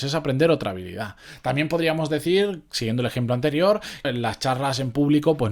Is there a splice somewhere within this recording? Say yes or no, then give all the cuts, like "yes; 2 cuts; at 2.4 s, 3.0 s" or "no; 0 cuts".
yes; 1 cut; at 4.0 s